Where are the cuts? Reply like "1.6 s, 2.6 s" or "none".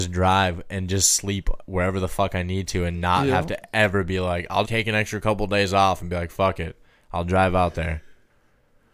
4.6 s